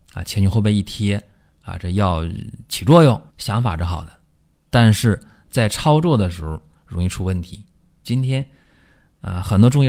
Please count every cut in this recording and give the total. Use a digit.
2